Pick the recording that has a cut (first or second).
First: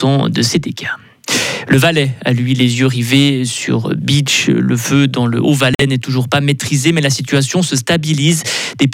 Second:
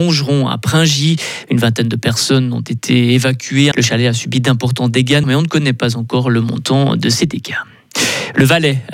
second